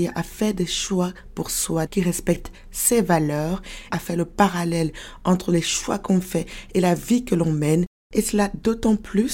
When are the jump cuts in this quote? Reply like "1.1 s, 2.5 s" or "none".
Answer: 1.9 s, 3.9 s